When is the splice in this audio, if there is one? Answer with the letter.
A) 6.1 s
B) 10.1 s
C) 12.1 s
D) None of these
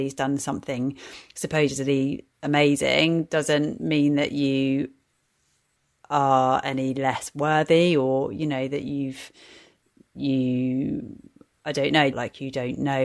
C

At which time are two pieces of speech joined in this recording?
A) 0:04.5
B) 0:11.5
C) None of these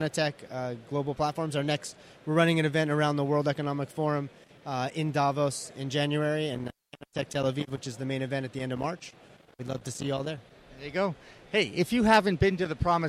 C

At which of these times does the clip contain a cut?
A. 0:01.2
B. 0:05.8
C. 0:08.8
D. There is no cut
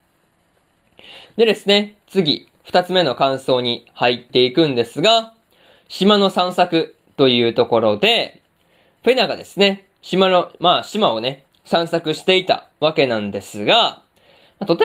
A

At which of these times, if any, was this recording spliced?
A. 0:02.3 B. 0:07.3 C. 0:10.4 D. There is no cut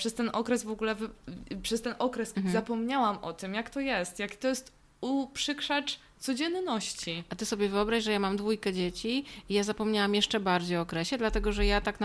A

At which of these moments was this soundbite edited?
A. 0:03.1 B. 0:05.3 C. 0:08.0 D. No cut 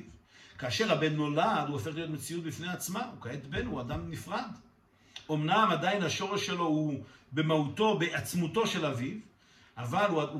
D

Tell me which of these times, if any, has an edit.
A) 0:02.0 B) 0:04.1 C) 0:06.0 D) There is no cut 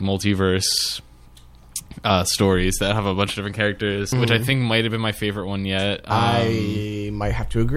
B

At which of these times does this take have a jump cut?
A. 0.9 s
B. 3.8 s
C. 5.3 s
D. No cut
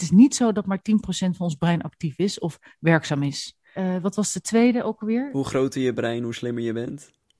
B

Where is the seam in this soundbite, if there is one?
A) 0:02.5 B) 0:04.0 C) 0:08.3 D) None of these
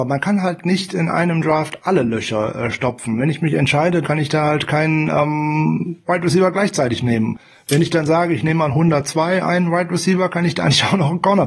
B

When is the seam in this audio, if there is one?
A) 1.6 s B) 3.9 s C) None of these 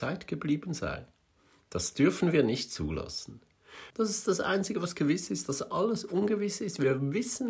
B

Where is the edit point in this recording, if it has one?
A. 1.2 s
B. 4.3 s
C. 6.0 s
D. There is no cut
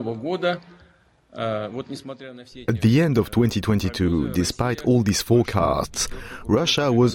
D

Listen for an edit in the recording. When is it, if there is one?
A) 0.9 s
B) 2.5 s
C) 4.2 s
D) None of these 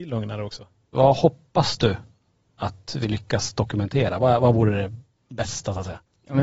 A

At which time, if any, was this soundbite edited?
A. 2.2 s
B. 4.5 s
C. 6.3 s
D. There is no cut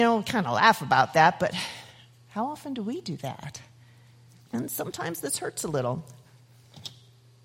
B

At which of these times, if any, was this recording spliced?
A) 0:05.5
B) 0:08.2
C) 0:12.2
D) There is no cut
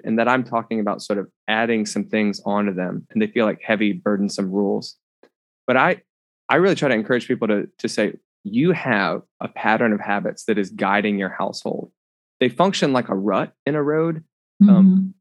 B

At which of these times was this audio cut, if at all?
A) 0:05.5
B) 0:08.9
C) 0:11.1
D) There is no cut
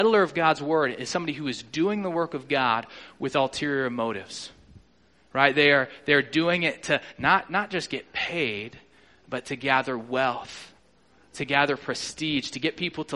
D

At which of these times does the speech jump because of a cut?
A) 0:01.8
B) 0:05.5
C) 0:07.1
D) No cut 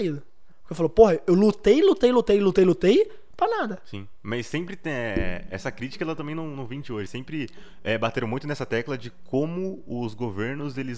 C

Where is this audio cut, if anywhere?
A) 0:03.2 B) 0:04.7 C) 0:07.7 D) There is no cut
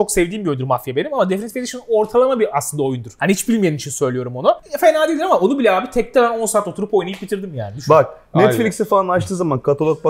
D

